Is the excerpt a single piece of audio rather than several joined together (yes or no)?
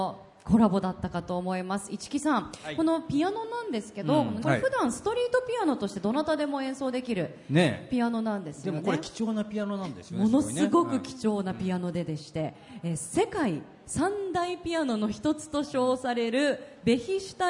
no